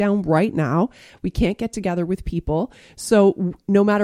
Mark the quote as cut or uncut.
uncut